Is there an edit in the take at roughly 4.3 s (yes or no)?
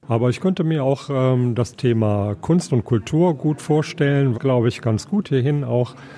yes